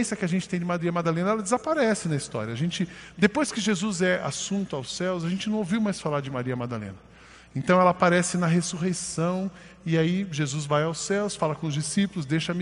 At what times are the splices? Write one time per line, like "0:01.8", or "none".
none